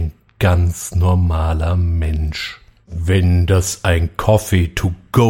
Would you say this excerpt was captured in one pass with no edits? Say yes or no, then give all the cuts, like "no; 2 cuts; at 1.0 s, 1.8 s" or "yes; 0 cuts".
no; 1 cut; at 2.8 s